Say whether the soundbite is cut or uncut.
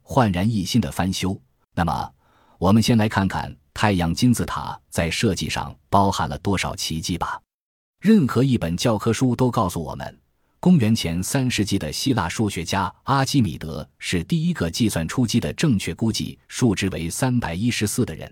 cut